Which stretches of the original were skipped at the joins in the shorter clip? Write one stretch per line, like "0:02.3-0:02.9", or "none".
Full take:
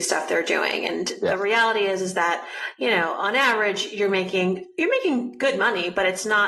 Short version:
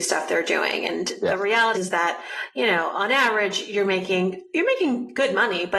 0:01.7-0:02.0